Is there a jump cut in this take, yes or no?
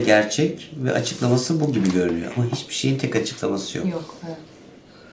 no